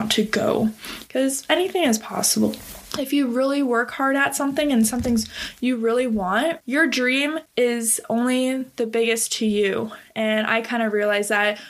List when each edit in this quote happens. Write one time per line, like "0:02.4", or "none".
none